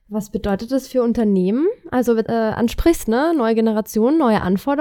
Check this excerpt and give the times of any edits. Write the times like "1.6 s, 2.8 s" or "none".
2.3 s